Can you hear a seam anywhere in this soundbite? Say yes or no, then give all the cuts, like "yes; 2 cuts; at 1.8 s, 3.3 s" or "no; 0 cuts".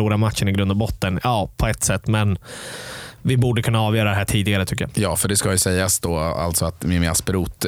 no; 0 cuts